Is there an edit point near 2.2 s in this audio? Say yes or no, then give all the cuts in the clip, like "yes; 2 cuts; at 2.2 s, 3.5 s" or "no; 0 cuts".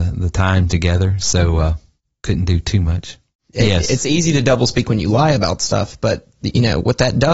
no; 1 cut; at 3.5 s